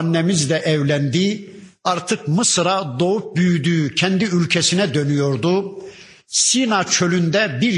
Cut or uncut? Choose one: uncut